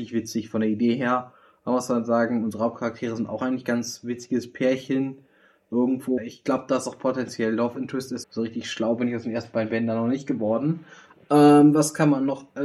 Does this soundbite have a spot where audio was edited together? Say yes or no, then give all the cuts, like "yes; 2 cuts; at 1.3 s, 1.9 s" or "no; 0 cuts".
yes; 2 cuts; at 6.2 s, 8.2 s